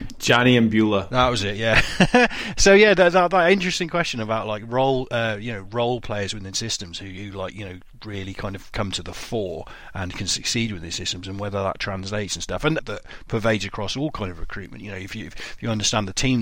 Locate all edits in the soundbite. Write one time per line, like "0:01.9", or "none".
0:12.8